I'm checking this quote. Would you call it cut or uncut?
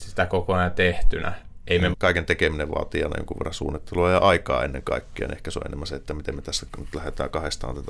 cut